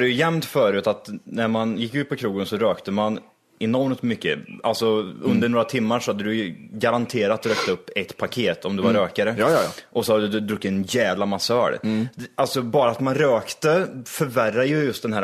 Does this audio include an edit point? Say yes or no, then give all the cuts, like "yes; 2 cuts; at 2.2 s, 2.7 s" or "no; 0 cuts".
no; 0 cuts